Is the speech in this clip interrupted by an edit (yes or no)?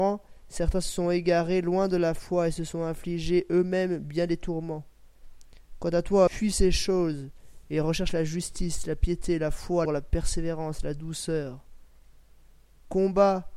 yes